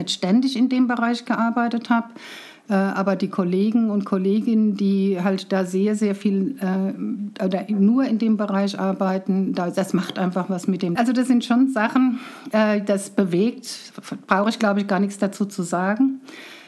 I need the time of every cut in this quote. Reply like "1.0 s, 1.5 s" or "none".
11.0 s